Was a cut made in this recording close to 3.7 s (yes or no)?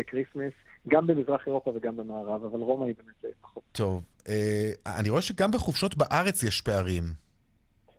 yes